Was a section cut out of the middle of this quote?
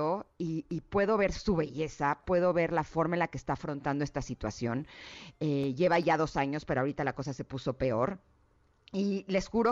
no; 0 cuts

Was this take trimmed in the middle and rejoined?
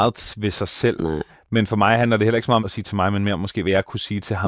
yes; 2 cuts; at 1.0 s, 2.6 s

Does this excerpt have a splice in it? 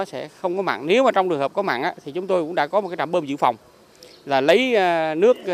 no; 0 cuts

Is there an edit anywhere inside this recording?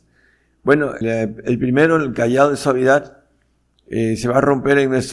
yes; 1 cut; at 1.0 s

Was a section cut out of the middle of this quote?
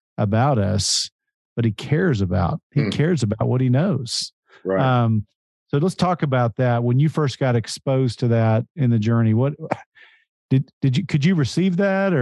yes; 1 cut; at 2.6 s

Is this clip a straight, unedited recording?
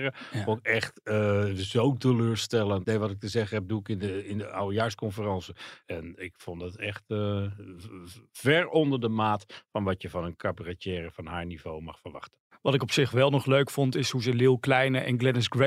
no; 2 cuts; at 2.8 s, 5.8 s

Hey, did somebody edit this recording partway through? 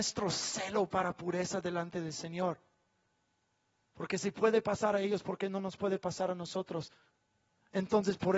no; 0 cuts

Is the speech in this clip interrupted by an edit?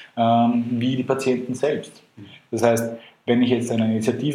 no; 0 cuts

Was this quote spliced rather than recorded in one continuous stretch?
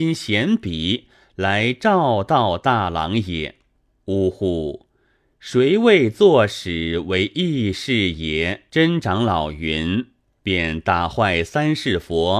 yes; 2 cuts; at 4.0 s, 8.7 s

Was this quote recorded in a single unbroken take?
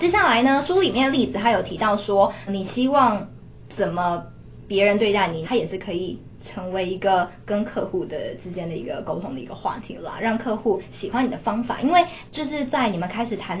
no; 2 cuts; at 2.5 s, 5.4 s

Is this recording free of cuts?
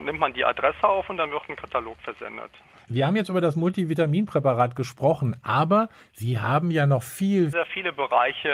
no; 2 cuts; at 2.8 s, 7.5 s

